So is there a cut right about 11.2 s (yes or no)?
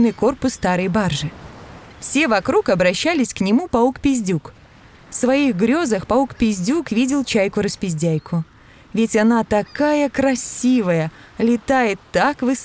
no